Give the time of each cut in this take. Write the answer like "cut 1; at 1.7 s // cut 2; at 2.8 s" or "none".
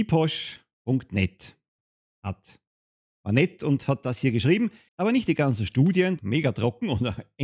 cut 1; at 4.9 s // cut 2; at 6.2 s